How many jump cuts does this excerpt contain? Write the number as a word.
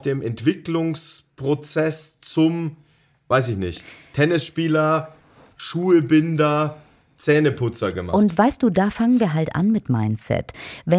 zero